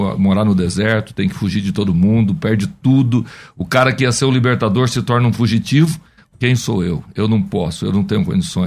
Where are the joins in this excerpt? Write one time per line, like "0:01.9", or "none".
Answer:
0:06.3